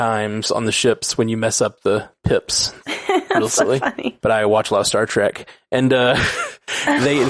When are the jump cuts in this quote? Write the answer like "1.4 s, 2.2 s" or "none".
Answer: 4.2 s